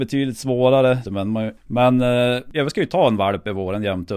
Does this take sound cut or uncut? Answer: cut